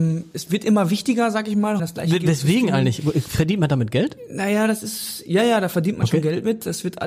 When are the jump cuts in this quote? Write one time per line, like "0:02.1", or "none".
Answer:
0:01.8

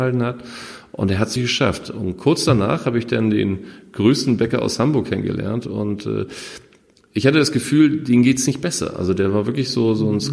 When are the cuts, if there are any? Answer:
0:01.4

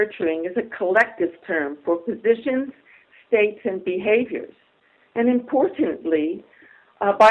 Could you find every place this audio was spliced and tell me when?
none

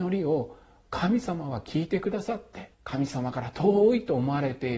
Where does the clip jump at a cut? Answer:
0:02.7

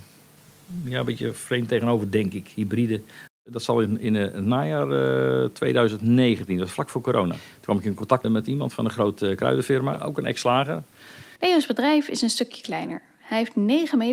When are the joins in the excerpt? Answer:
0:03.3
0:08.2
0:11.4

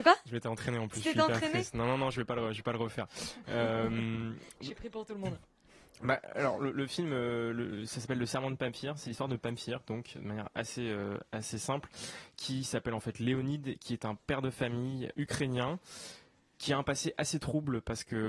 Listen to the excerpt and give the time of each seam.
0:15.1

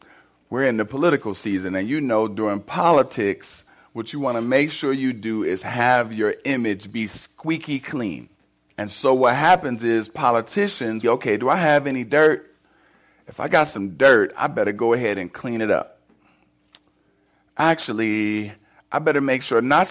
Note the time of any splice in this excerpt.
0:08.7
0:11.0

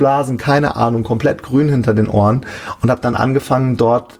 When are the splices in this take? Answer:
none

